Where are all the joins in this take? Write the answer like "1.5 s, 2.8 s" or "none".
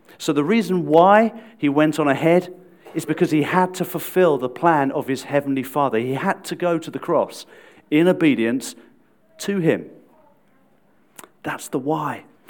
none